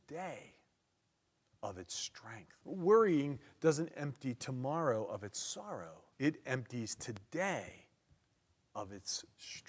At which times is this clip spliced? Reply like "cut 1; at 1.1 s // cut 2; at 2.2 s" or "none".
cut 1; at 2.6 s // cut 2; at 6.1 s